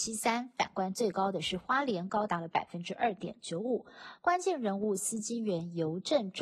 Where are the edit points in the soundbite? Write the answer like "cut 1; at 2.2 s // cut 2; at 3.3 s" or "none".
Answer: cut 1; at 4.2 s